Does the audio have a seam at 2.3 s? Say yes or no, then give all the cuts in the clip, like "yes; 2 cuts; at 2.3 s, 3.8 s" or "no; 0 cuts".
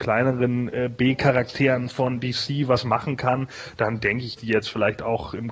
no; 1 cut; at 4.4 s